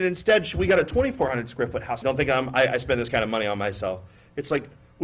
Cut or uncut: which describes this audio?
cut